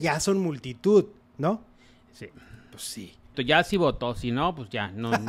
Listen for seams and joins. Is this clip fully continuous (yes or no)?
no